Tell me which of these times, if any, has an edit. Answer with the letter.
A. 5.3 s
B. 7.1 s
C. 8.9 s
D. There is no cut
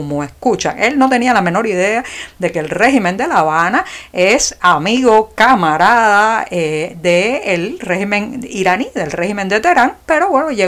D